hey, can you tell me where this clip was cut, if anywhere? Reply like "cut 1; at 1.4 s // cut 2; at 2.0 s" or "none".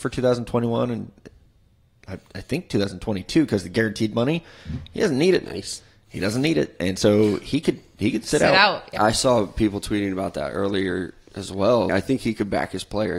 cut 1; at 9.0 s // cut 2; at 11.9 s